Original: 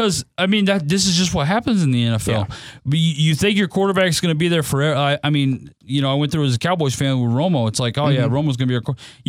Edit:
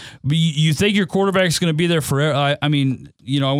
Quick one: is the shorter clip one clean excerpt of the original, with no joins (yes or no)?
yes